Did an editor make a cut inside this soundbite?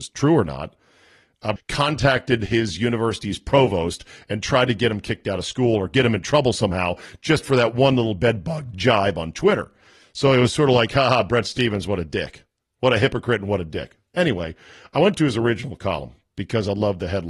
yes; 1 cut; at 1.6 s

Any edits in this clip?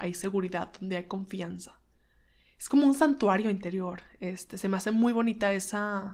no; 0 cuts

